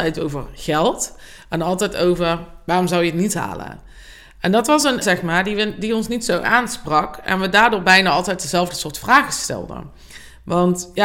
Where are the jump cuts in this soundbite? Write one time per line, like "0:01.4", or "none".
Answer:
0:05.0